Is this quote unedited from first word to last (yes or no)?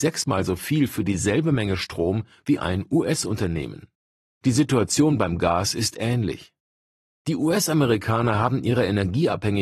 no